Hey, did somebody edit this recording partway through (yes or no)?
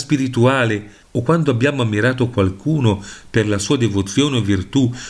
yes